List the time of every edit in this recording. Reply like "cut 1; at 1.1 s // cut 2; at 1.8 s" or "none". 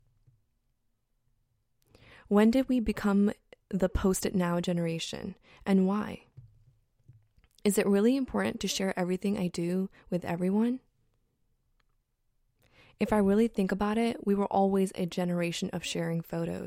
none